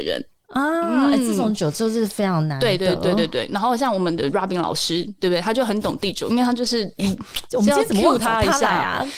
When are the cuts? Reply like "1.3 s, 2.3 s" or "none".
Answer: none